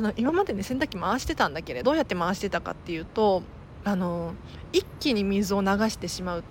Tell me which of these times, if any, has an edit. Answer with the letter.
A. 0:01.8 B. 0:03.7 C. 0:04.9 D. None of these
A